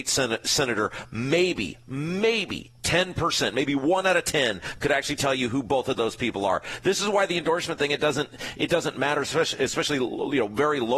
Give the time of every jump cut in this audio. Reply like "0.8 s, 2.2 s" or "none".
none

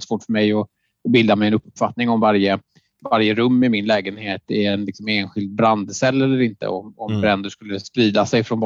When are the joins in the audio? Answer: none

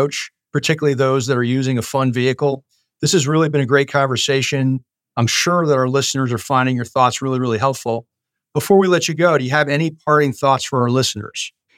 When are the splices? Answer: none

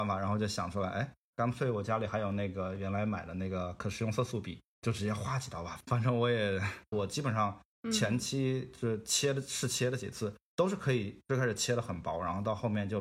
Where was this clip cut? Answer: 6.9 s

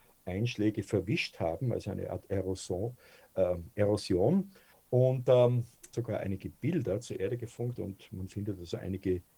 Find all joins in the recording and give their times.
4.7 s, 5.9 s, 7.8 s

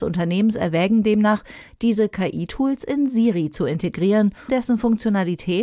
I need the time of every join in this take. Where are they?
4.5 s

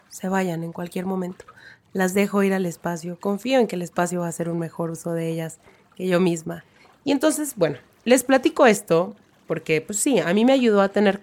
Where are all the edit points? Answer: none

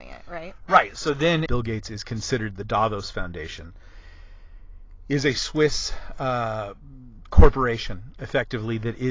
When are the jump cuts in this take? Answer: 1.5 s

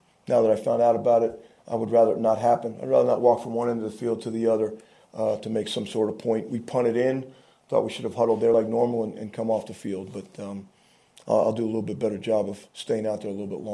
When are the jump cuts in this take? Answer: none

